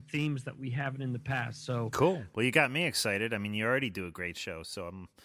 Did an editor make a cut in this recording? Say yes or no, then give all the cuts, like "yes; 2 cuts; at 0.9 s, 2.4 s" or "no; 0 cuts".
no; 0 cuts